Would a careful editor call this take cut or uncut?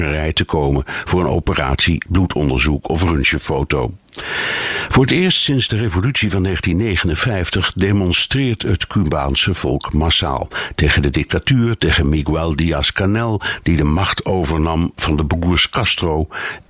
cut